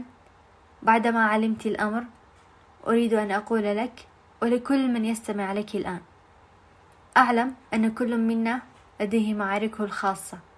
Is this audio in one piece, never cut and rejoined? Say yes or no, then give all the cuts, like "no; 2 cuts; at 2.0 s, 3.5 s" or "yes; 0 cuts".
no; 1 cut; at 7.6 s